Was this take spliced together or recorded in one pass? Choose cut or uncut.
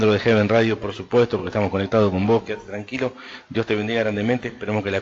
uncut